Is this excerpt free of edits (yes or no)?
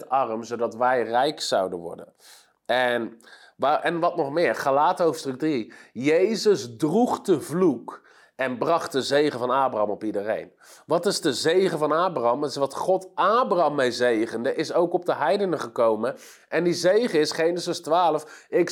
yes